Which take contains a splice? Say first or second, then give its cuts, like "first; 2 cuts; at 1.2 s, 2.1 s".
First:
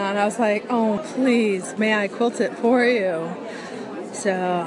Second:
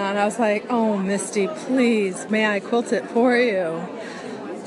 first; 1 cut; at 1.0 s